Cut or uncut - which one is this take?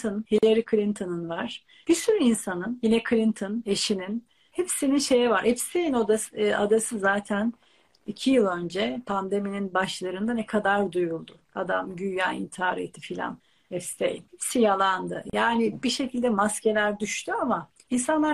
uncut